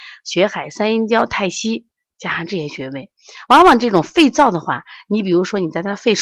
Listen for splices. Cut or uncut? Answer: uncut